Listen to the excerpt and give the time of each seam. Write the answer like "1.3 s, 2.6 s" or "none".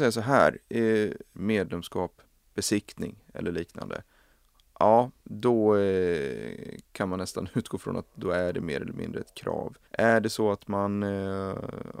1.3 s, 9.8 s